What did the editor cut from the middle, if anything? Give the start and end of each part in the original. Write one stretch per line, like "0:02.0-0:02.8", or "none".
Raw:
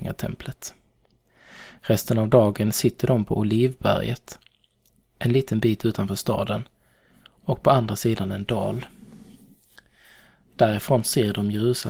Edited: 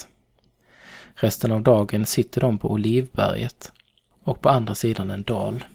0:04.8-0:07.3